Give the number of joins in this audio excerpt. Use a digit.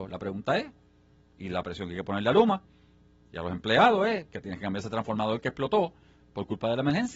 0